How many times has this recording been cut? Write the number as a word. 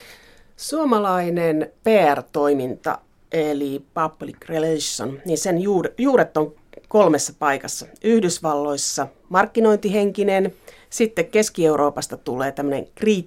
zero